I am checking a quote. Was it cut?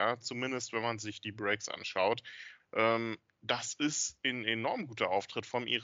yes; 1 cut; at 2.6 s

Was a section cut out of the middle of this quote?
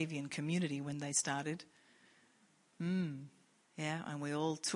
yes; 1 cut; at 3.6 s

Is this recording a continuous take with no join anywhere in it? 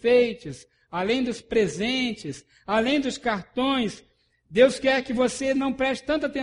yes; 0 cuts

